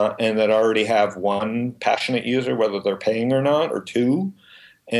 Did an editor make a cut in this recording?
no; 0 cuts

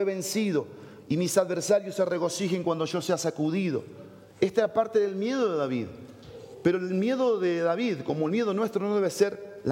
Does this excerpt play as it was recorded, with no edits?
yes; 0 cuts

